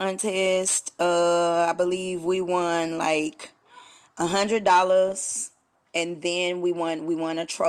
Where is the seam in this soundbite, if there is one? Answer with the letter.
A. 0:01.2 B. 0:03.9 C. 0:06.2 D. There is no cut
D